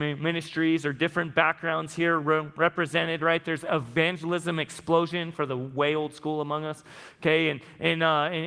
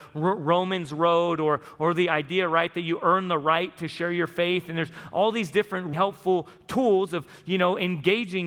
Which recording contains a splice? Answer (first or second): second